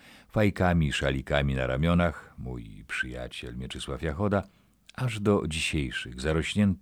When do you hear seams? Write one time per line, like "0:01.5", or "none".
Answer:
none